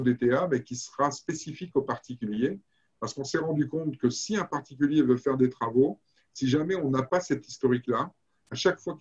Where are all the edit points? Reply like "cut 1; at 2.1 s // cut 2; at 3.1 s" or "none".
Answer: none